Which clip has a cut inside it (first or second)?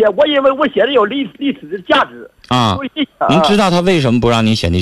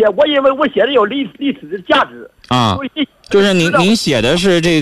first